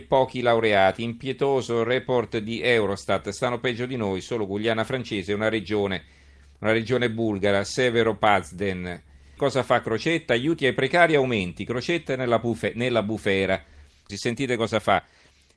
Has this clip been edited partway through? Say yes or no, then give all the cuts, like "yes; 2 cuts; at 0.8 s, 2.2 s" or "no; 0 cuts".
yes; 2 cuts; at 9.4 s, 14.1 s